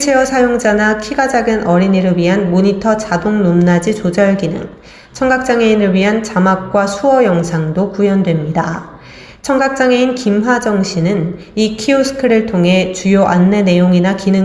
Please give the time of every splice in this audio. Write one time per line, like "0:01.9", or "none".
0:09.4